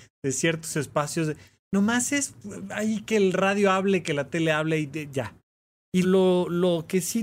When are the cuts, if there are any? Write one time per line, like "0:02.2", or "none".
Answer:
0:06.0